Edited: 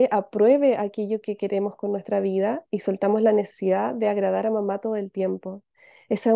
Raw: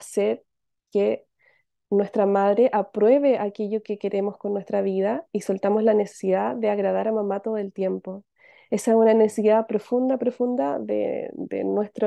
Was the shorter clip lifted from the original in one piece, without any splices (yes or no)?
yes